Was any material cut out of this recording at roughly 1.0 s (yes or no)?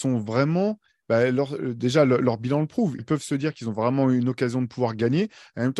no